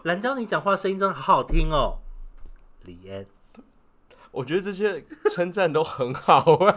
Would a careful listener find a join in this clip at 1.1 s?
yes; 1 cut; at 1.1 s

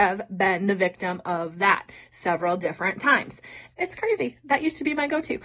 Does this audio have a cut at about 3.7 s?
yes; 1 cut; at 3.7 s

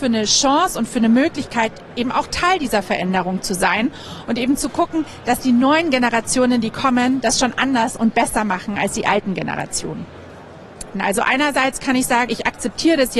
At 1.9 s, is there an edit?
no; 2 cuts; at 10.9 s, 12.3 s

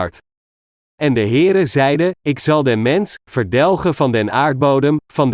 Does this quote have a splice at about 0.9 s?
no; 1 cut; at 3.2 s

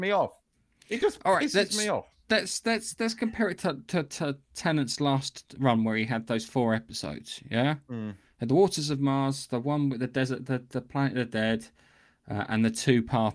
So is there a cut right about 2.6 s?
no; 0 cuts

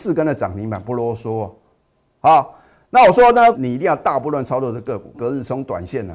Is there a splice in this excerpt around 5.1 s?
yes; 2 cuts; at 3.5 s, 5.1 s

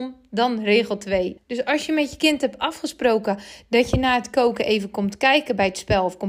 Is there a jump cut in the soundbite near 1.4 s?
yes; 1 cut; at 1.4 s

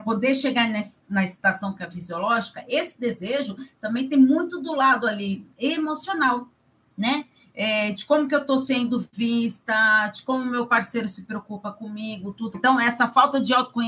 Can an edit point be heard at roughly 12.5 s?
yes; 1 cut; at 12.5 s

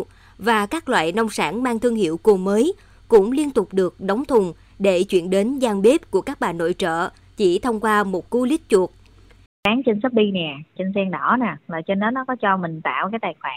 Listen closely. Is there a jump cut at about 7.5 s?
no; 2 cuts; at 9.5 s, 10.8 s

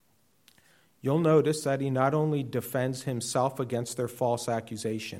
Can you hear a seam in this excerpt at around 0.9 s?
no; 0 cuts

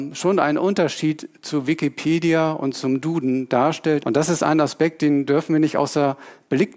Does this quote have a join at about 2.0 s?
no; 1 cut; at 4.0 s

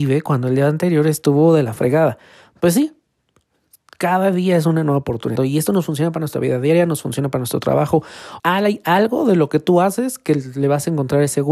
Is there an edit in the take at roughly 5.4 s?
yes; 2 cuts; at 5.4 s, 8.4 s

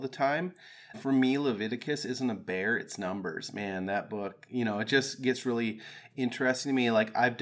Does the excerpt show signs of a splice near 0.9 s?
yes; 1 cut; at 0.9 s

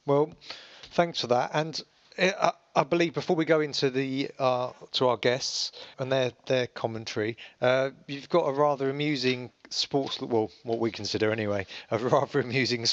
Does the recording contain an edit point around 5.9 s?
yes; 1 cut; at 5.9 s

